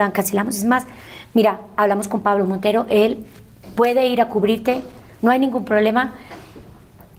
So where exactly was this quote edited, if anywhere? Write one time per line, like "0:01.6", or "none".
none